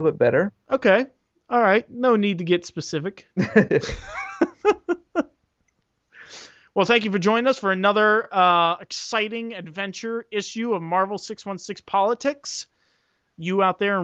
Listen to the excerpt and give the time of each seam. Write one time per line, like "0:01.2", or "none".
none